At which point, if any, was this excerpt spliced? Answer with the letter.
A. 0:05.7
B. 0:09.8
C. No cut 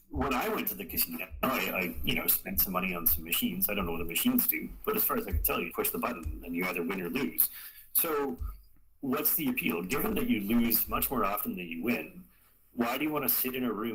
A